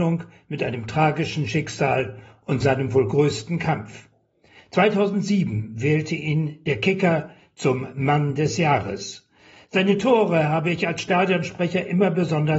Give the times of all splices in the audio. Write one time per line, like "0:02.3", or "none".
none